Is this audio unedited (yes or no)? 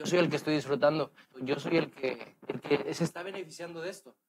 no